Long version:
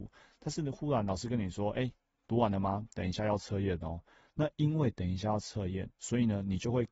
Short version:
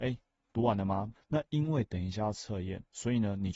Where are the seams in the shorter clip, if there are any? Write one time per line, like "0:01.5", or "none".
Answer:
0:01.2